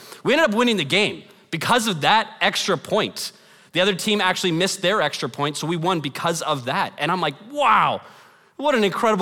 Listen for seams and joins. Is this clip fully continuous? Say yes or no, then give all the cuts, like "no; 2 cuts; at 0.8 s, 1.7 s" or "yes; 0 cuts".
yes; 0 cuts